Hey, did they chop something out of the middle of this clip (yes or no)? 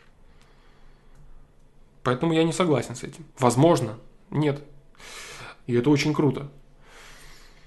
yes